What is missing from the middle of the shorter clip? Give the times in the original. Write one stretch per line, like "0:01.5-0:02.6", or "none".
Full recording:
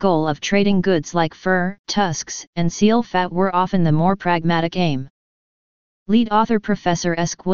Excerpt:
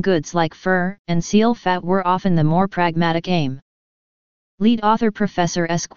0:01.8-0:02.5